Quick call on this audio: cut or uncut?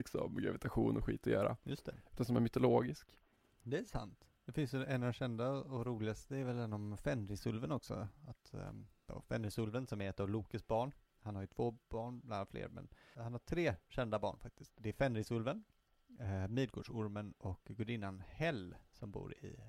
cut